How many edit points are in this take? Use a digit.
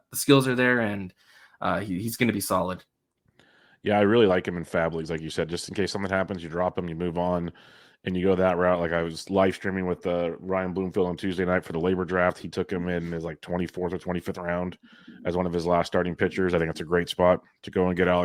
0